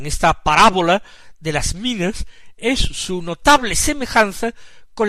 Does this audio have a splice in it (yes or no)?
no